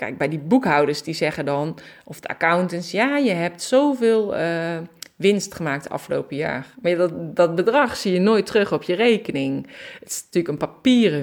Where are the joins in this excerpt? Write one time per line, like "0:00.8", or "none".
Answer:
none

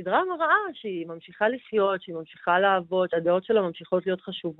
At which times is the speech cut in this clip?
0:03.1

